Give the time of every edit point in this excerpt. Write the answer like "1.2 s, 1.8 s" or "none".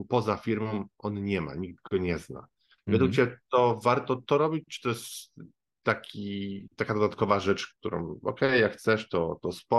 none